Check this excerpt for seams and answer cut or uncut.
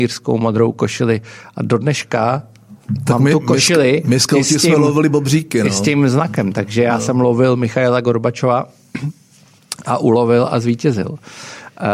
uncut